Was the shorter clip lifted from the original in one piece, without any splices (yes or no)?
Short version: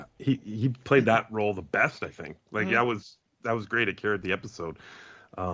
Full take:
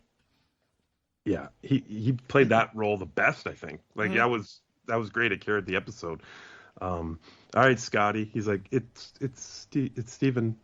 yes